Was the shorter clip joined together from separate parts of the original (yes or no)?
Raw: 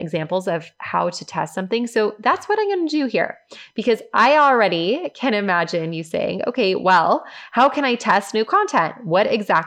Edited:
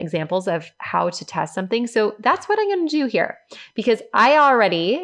no